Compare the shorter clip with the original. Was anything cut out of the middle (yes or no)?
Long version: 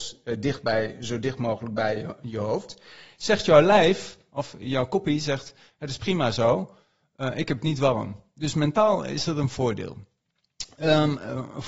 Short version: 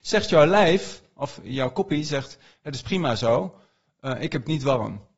no